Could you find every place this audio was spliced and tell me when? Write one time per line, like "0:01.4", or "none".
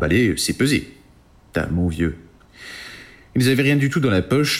none